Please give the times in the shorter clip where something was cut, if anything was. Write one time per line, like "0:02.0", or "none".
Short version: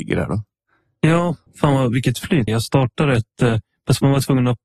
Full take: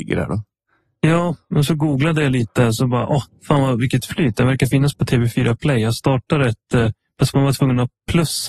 0:01.5
0:02.5